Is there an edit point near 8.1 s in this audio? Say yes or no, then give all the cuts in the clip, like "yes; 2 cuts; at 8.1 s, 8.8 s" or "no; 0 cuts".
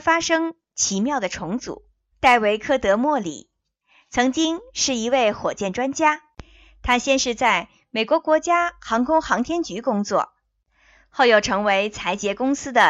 no; 1 cut; at 2.1 s